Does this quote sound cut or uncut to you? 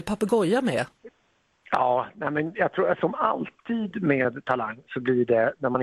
uncut